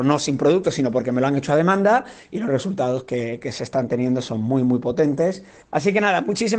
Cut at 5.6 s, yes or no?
yes